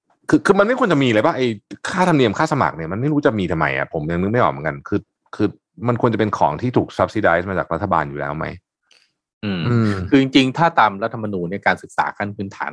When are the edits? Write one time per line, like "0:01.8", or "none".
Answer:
none